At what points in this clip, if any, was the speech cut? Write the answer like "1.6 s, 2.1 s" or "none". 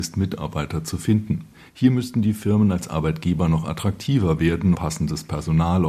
4.7 s